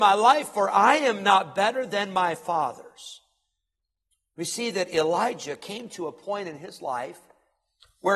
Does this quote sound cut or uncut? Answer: uncut